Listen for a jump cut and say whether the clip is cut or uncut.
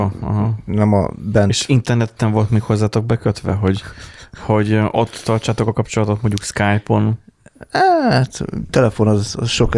uncut